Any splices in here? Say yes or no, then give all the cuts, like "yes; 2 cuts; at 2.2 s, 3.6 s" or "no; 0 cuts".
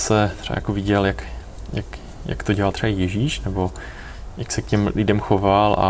no; 0 cuts